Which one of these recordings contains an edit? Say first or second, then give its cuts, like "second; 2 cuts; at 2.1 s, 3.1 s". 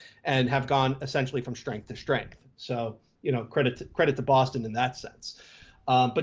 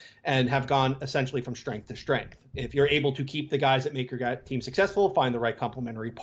second; 1 cut; at 2.5 s